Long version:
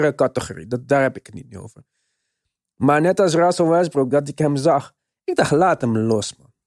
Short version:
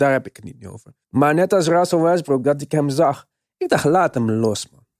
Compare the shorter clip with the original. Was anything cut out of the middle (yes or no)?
yes